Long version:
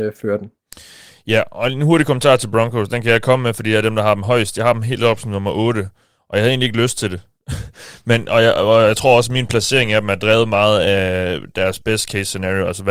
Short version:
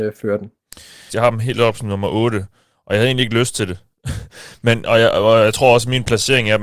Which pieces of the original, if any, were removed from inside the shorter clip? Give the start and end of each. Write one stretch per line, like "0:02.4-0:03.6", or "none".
0:01.1-0:04.5